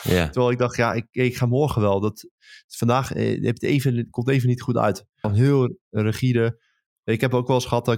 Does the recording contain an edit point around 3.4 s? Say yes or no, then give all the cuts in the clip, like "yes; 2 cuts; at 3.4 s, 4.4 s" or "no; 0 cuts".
no; 1 cut; at 5.2 s